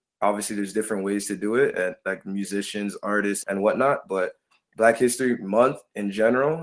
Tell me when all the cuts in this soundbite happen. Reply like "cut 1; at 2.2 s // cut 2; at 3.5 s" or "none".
cut 1; at 3.4 s